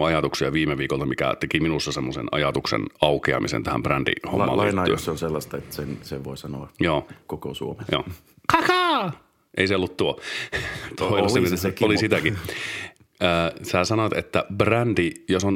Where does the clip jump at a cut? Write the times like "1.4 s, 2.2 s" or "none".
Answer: none